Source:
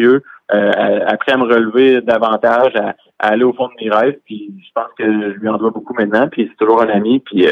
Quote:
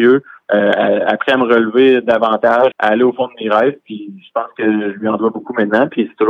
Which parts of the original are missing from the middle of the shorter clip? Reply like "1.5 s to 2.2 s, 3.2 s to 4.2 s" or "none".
2.7 s to 3.1 s